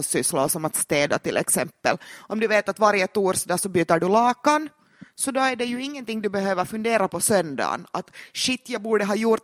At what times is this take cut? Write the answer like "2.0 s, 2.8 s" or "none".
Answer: 7.1 s